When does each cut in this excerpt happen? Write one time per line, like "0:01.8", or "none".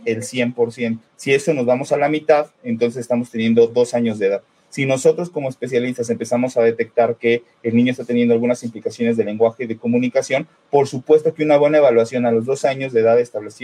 0:01.1